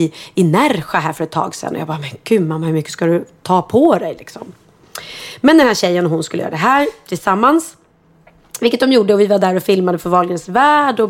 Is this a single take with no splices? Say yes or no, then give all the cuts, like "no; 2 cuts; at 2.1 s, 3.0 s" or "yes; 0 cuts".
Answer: yes; 0 cuts